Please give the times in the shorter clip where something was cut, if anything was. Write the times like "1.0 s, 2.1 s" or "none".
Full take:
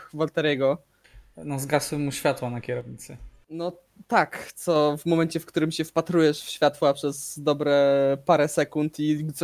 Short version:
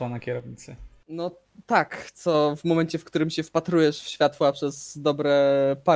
none

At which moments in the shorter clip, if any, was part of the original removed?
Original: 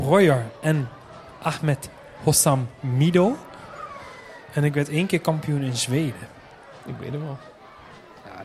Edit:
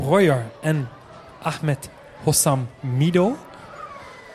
none

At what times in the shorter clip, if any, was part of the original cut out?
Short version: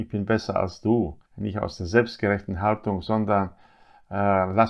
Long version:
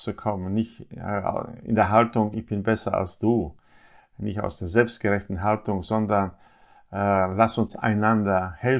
1.3 s

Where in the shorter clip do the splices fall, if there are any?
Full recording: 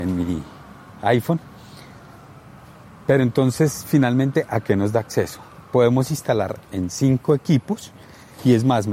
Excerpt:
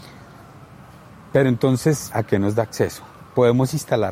2.1 s

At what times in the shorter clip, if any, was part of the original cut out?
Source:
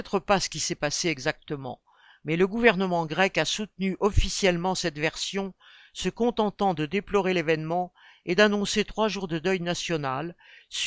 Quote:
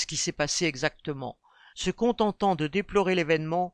1.7 s

